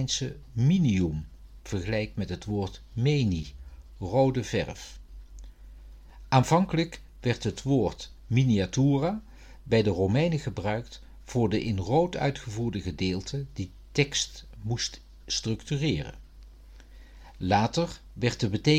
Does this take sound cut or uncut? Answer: uncut